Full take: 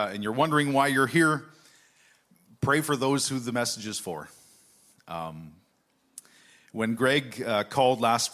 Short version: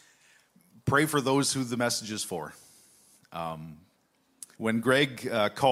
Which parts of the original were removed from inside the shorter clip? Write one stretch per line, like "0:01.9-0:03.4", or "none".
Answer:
0:06.3-0:06.7